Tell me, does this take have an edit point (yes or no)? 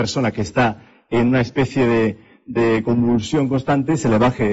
no